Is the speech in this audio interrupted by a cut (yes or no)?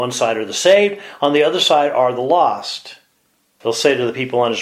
yes